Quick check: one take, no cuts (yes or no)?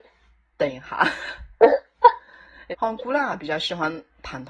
no